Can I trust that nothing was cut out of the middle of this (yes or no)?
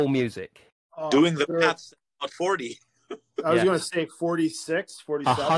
yes